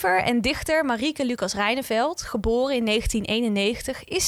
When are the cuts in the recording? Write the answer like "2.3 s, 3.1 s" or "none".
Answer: none